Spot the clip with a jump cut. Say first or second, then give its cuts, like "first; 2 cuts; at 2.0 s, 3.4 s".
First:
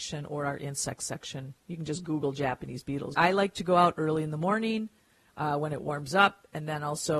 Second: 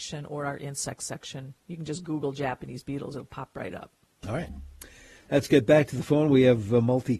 first; 1 cut; at 3.1 s